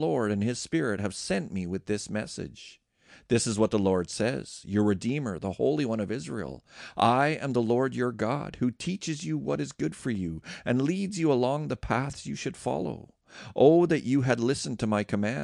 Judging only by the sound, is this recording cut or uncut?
uncut